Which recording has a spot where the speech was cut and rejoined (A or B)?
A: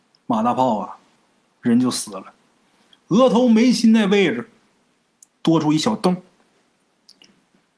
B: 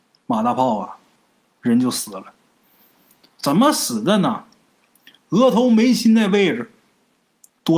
A